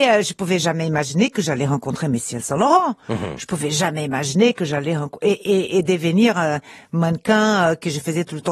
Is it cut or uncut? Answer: uncut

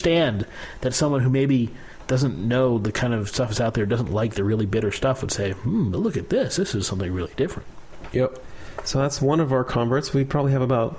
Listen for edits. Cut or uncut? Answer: uncut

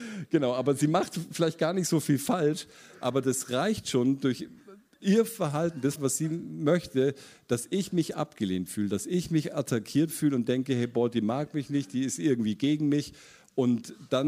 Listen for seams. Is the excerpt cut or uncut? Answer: cut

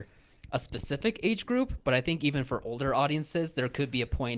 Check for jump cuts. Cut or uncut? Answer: uncut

